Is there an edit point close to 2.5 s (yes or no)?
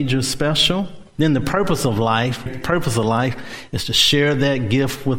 yes